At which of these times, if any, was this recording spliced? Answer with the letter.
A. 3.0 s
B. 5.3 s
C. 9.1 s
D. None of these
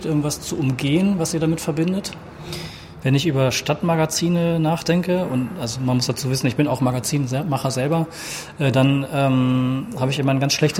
A